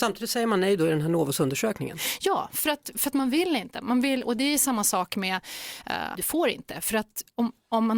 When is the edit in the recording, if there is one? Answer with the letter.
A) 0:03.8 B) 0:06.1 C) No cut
B